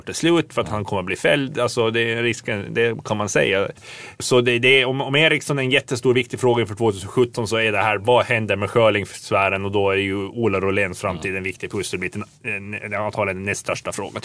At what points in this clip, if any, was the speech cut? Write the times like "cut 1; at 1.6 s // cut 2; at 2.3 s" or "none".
none